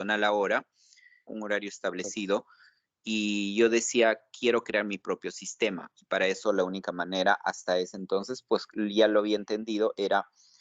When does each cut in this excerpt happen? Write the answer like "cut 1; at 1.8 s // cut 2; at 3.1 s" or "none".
cut 1; at 1.3 s